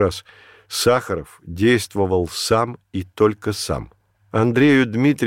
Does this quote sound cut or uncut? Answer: cut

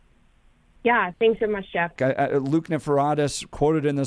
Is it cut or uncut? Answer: cut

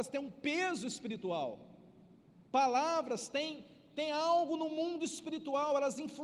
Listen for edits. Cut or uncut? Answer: cut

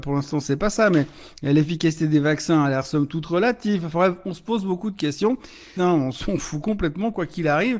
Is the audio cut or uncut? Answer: cut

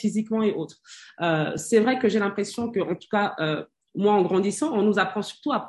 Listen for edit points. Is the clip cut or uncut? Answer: uncut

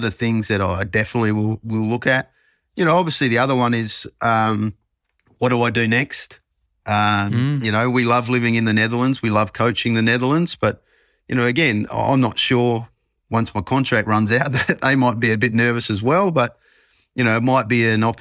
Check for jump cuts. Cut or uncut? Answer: uncut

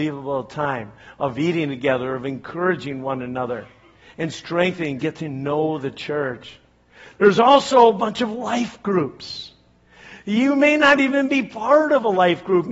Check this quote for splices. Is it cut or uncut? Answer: uncut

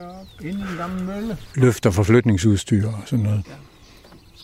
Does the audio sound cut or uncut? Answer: cut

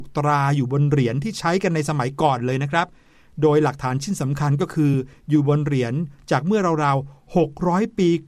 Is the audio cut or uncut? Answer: uncut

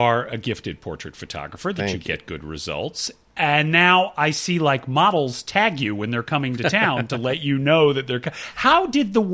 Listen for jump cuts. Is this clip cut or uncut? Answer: uncut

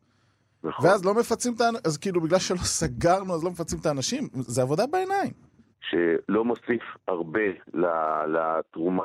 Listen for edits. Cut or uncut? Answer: cut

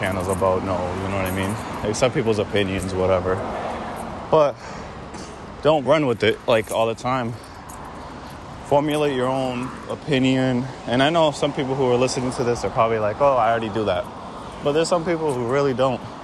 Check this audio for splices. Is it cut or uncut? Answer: uncut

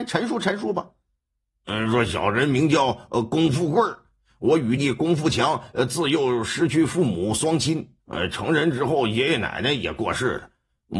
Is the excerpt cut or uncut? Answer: cut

